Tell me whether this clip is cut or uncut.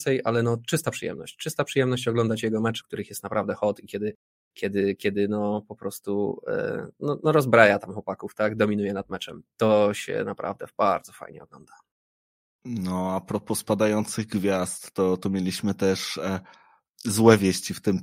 cut